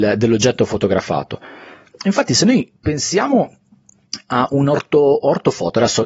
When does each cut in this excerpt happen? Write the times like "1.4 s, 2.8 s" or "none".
1.9 s